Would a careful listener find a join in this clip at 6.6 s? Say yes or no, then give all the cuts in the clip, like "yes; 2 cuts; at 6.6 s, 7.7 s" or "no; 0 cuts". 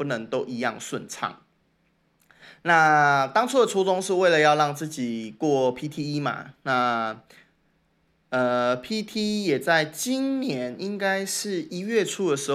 no; 0 cuts